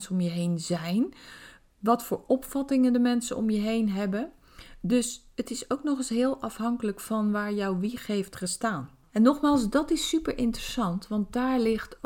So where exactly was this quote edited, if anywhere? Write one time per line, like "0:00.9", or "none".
0:09.1